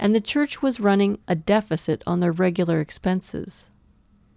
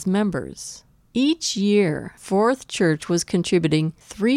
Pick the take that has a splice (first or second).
second